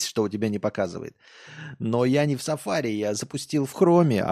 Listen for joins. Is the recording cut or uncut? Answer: uncut